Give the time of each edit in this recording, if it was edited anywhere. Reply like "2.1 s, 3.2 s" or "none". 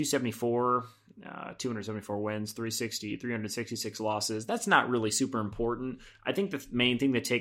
none